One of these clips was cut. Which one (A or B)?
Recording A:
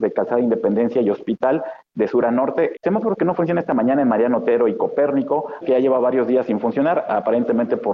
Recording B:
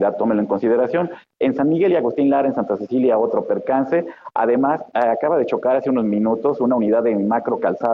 A